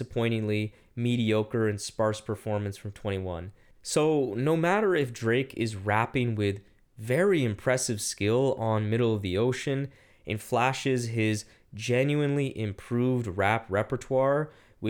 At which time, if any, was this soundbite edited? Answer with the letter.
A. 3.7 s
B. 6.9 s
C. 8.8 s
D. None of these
A